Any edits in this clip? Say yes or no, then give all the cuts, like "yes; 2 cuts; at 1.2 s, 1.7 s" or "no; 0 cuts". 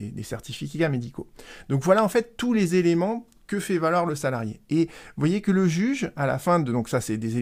no; 0 cuts